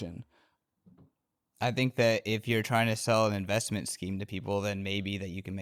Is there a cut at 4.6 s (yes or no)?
no